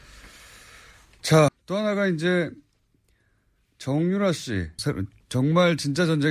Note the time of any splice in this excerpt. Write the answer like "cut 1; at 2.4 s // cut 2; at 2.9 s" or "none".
cut 1; at 1.5 s // cut 2; at 4.8 s